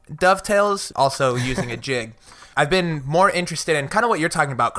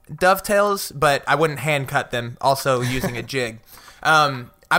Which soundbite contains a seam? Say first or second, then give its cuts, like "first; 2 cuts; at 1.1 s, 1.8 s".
first; 2 cuts; at 0.9 s, 2.5 s